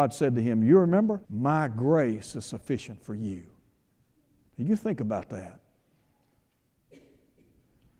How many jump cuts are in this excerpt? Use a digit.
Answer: 1